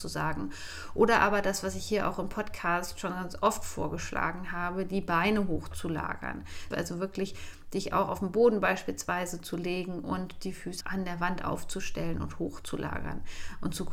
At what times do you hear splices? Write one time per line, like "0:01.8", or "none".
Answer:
0:06.7
0:10.8